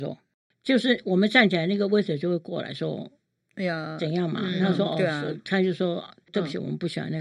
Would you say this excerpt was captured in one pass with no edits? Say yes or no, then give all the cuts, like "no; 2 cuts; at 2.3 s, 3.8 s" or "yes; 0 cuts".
yes; 0 cuts